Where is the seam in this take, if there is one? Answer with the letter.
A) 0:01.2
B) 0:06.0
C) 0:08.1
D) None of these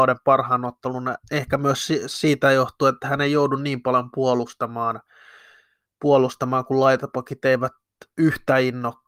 A